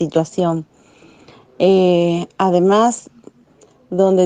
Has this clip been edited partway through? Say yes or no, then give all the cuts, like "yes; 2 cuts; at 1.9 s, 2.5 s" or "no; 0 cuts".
no; 0 cuts